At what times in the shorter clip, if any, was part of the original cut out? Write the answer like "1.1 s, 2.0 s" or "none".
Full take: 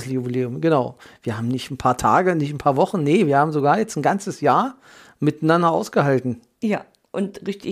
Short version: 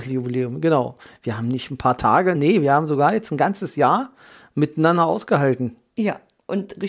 2.3 s